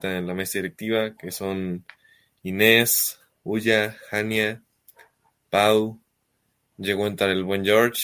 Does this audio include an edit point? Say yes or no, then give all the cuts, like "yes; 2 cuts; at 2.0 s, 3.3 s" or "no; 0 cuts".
no; 0 cuts